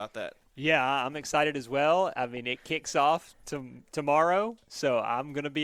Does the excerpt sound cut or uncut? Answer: uncut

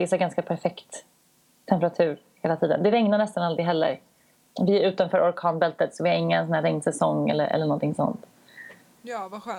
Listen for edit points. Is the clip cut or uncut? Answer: uncut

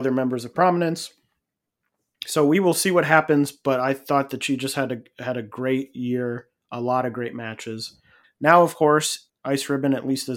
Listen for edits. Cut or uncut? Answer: cut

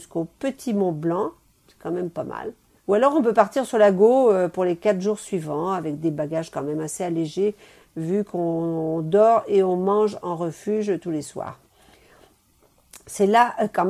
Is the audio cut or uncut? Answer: cut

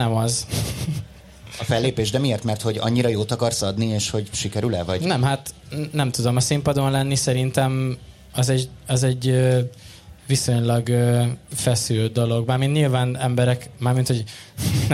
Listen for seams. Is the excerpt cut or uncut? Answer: uncut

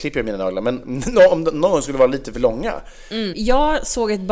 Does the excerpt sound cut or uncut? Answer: cut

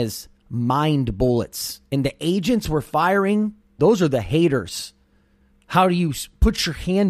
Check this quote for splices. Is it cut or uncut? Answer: cut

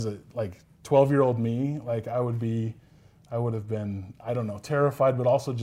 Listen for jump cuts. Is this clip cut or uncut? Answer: uncut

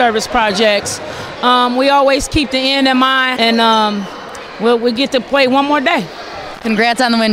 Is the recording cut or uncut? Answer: cut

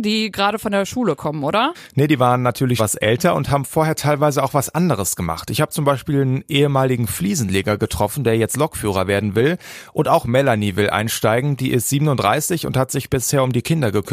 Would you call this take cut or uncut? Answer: cut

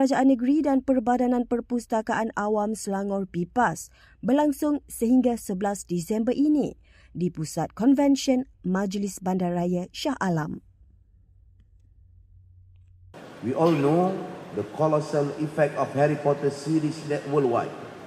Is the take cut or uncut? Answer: uncut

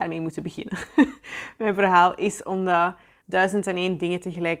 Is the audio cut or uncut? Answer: cut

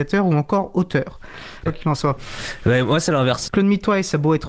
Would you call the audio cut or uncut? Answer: cut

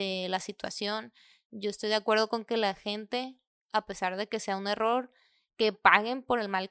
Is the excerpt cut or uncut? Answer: uncut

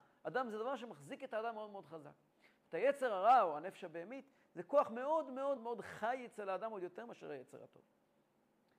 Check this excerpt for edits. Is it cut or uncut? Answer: cut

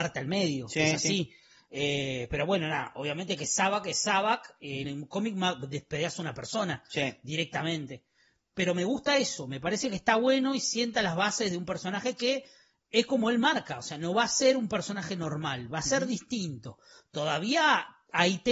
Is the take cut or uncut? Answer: cut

